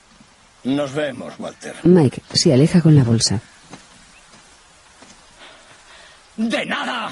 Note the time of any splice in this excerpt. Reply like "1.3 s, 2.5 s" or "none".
none